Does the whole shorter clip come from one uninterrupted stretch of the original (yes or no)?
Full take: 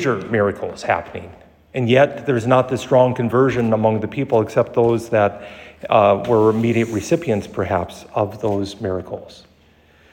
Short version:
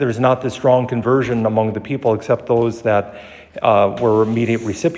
yes